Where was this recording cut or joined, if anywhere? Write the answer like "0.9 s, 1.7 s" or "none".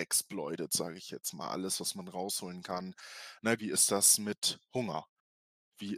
3.6 s